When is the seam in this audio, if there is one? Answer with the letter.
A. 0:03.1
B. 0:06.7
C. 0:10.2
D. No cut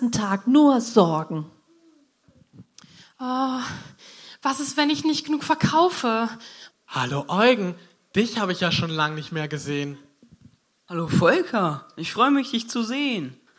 B